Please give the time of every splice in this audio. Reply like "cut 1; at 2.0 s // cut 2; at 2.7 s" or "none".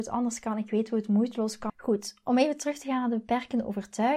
cut 1; at 1.7 s